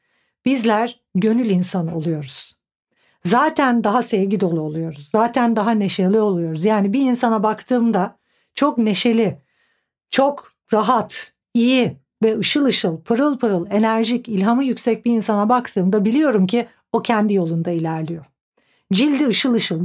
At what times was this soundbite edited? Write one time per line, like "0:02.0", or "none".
0:11.4